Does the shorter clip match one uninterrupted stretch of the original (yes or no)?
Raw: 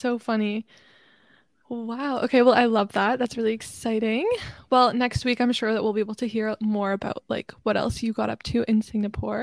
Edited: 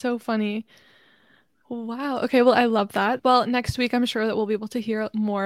no